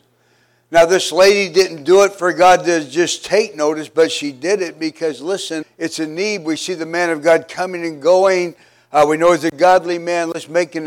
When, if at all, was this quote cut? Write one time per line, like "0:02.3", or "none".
0:05.6